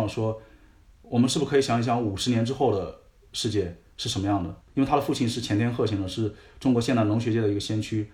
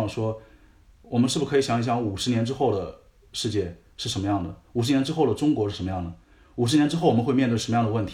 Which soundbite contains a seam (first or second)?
first